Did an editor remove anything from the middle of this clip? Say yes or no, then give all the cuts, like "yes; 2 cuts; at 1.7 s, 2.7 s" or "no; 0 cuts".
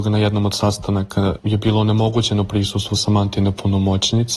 no; 0 cuts